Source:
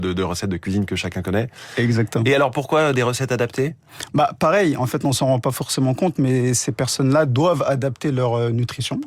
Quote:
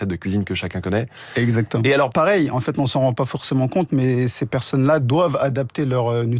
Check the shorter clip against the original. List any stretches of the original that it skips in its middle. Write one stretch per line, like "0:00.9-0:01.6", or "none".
0:02.5-0:04.4